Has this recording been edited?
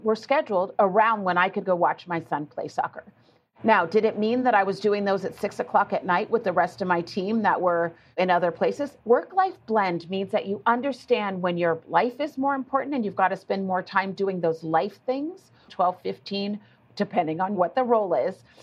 yes; 2 cuts; at 9.0 s, 15.7 s

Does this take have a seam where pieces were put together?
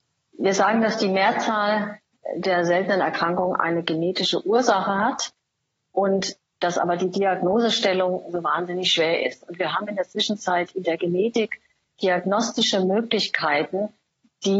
no; 0 cuts

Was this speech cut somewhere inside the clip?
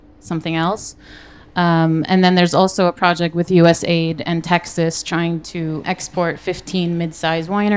yes; 1 cut; at 5.8 s

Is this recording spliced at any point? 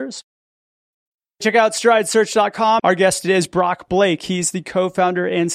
yes; 1 cut; at 2.8 s

